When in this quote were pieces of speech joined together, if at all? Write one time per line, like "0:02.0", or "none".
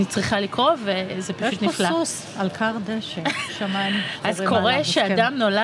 0:03.5